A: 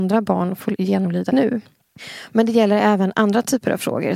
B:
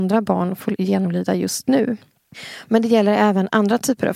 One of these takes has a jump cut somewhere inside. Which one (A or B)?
A